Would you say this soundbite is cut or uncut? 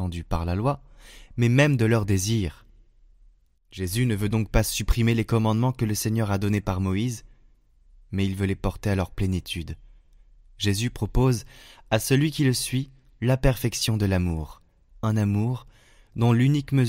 cut